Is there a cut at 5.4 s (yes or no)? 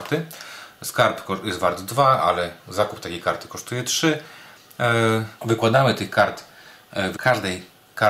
yes